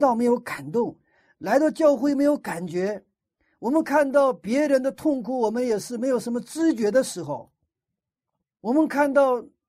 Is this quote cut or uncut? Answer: uncut